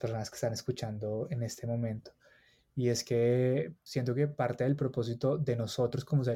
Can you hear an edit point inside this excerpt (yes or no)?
yes